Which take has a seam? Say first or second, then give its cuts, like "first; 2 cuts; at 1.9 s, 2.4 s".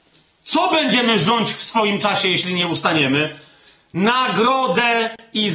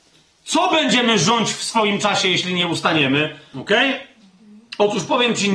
second; 1 cut; at 3.5 s